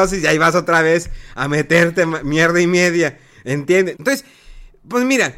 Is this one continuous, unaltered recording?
no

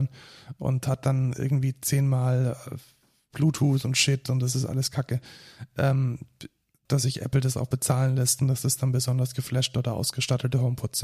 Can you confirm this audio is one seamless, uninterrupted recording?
no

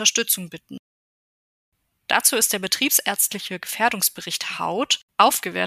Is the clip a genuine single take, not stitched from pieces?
yes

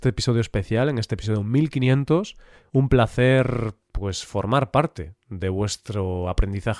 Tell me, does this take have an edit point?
no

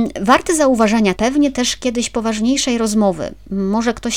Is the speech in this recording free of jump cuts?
no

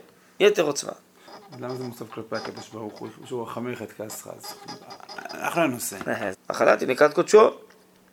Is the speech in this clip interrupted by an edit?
yes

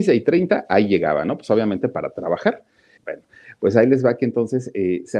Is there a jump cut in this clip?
yes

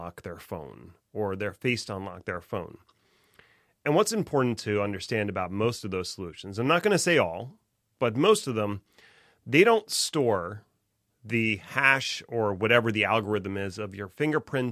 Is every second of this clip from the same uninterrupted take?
yes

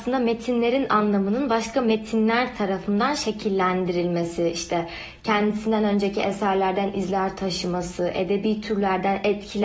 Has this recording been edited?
no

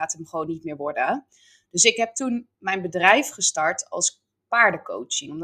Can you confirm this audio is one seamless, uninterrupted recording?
yes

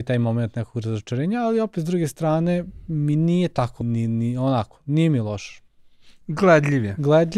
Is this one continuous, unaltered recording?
no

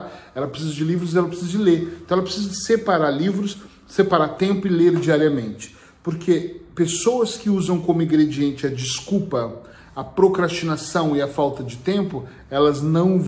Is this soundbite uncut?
yes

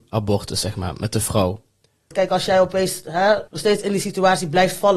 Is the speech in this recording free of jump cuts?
no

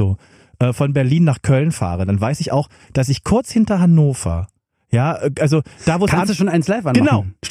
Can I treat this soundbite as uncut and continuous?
yes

